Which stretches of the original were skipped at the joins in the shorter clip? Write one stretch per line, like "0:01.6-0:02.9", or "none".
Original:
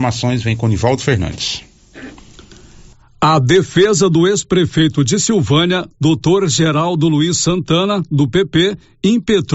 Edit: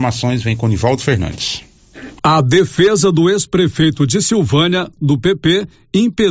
0:02.2-0:03.2
0:05.9-0:08.1

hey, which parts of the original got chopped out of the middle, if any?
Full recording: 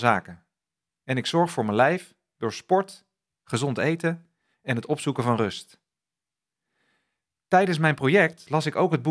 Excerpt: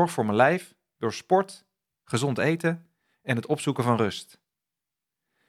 none

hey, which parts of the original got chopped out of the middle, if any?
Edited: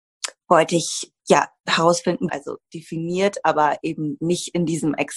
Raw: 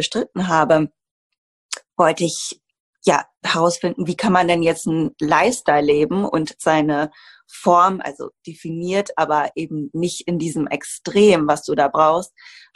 0:02.7-0:03.0
0:04.1-0:08.0

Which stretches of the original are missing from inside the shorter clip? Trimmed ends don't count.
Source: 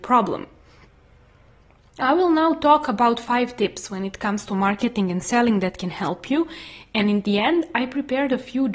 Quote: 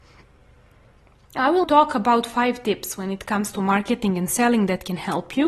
0:02.3-0:02.6

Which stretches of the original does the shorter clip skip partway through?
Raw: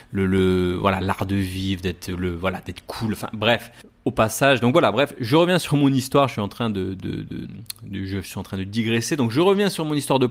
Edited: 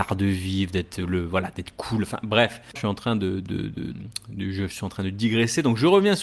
0:03.9-0:06.3

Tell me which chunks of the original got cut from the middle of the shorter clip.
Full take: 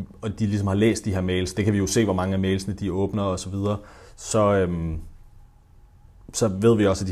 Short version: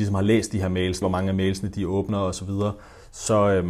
0:01.5-0:02.1

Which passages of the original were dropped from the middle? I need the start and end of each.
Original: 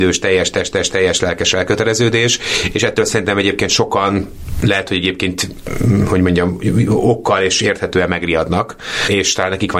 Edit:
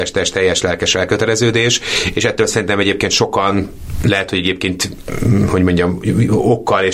none

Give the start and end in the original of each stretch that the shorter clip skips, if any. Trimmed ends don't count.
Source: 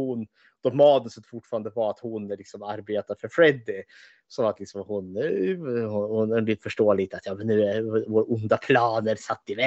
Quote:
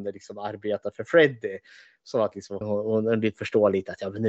0:04.9-0:05.9

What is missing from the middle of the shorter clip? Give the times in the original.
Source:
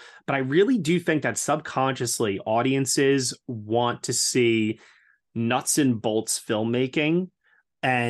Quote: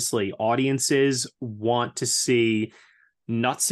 none

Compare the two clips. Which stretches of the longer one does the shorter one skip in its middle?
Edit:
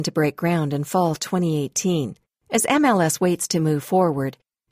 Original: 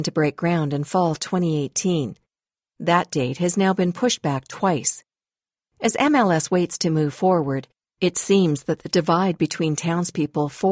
0:02.3-0:05.6

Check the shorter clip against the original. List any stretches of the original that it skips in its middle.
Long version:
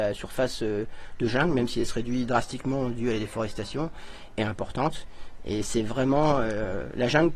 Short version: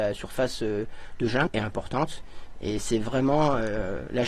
0:01.5-0:04.3

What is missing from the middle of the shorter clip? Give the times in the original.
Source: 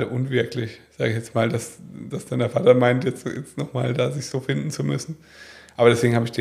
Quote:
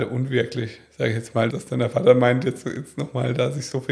0:01.5-0:02.1

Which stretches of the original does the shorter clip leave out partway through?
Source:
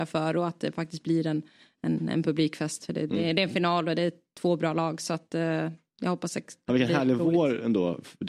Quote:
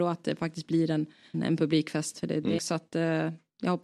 0:01.7-0:02.0
0:03.2-0:05.0

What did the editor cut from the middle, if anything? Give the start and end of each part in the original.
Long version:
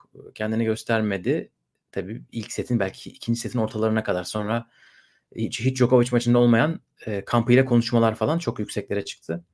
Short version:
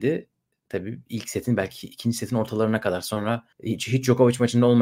0:04.8-0:05.2

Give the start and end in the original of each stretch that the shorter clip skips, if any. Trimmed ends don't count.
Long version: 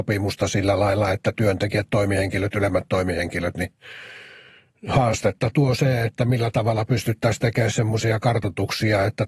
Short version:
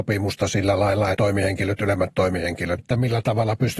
0:01.1-0:01.9
0:03.5-0:06.1

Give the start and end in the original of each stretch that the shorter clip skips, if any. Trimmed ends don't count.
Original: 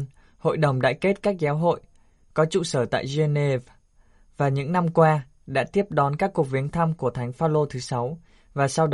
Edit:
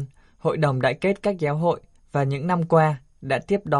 0:02.0-0:04.2

